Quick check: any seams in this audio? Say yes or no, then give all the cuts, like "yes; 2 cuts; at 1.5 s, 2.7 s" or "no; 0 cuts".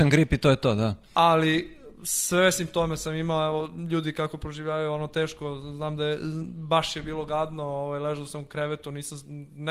no; 0 cuts